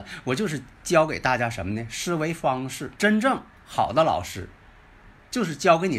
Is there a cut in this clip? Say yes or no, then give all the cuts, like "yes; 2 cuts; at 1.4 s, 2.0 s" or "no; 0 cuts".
yes; 1 cut; at 3.0 s